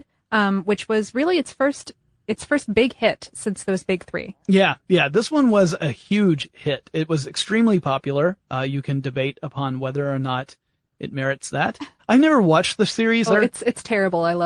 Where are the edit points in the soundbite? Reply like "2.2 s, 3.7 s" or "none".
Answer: 12.0 s, 13.3 s